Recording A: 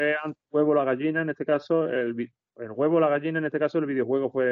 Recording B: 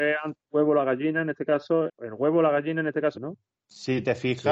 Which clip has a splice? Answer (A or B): B